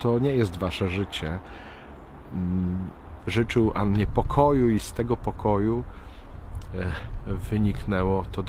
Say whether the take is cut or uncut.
cut